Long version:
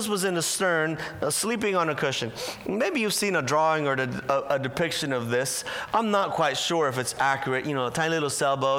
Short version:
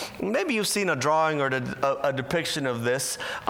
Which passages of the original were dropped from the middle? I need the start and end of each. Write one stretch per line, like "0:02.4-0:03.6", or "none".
none